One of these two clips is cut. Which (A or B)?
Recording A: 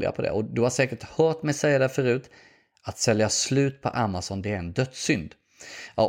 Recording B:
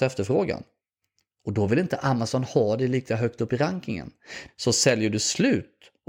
B